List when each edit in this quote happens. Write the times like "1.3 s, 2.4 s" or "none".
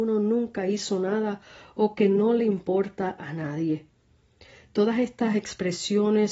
none